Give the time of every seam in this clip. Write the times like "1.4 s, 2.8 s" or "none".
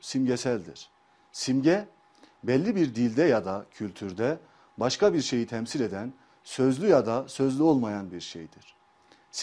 none